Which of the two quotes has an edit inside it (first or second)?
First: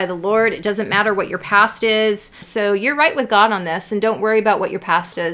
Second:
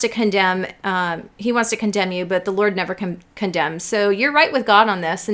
first